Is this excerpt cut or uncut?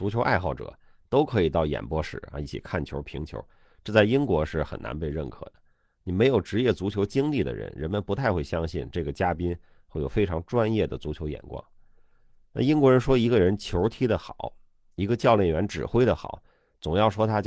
uncut